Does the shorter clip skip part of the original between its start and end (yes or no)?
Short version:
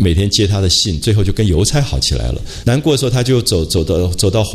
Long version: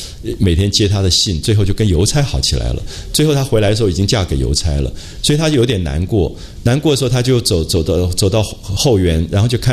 yes